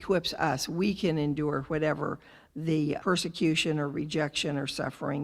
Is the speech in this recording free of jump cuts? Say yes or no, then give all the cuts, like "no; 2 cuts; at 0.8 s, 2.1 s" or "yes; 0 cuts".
no; 1 cut; at 3.0 s